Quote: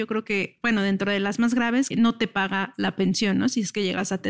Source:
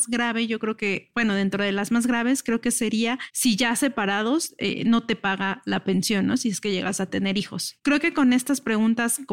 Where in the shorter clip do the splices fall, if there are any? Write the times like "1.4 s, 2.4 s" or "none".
1.9 s

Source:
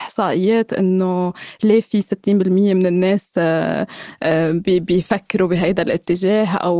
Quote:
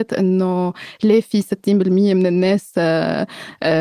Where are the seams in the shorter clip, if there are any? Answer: none

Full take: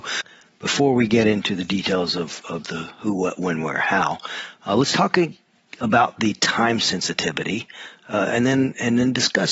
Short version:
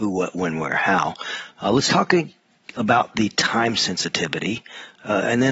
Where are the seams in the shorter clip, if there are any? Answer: none

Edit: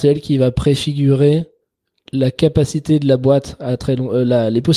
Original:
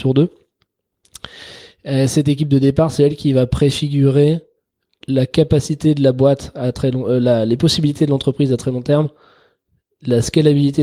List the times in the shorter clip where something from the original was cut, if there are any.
none

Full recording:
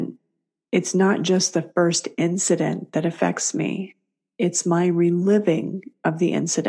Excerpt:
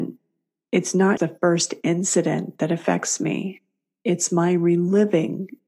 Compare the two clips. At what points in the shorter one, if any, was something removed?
1.2 s

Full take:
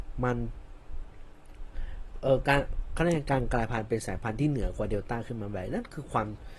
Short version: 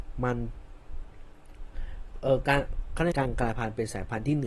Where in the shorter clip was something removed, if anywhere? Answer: 3.1 s

